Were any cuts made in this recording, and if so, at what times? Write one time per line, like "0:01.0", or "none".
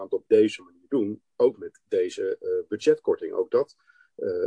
none